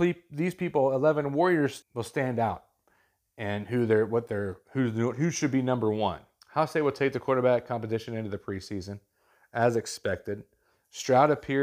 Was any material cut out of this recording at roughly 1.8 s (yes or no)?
yes